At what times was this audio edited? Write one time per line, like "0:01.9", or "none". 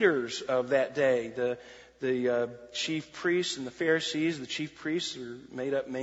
none